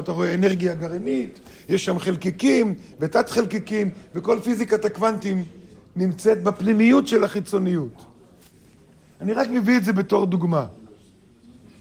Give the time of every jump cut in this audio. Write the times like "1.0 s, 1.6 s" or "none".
none